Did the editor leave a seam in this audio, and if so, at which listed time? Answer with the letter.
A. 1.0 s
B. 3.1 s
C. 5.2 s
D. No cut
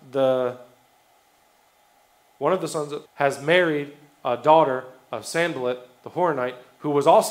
B